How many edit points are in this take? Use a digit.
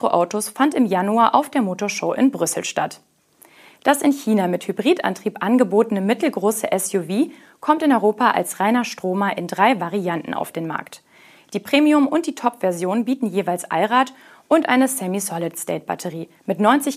1